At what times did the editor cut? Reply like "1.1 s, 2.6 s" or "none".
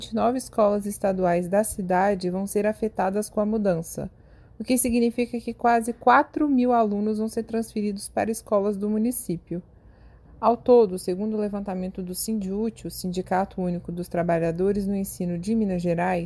10.2 s

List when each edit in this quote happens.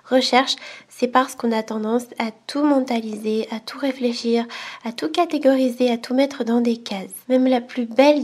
7.2 s

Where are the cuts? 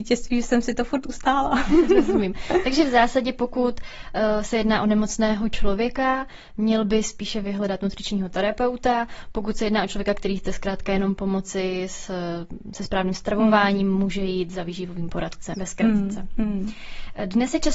15.5 s

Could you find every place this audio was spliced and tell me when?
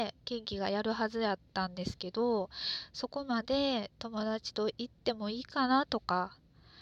1.5 s

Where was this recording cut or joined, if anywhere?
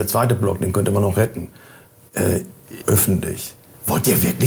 2.8 s

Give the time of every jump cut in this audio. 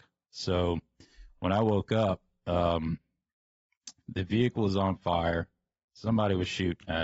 none

